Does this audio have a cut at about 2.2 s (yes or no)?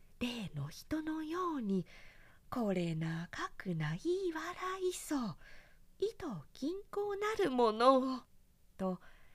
no